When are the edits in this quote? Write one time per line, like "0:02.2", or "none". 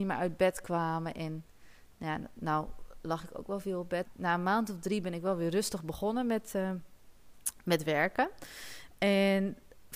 0:04.0